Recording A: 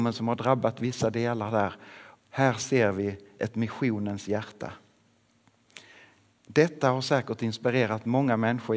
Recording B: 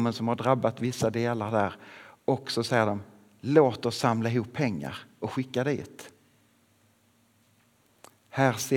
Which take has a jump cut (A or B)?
A